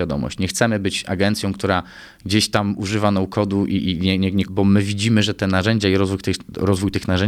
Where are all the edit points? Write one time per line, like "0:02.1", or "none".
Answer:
0:04.4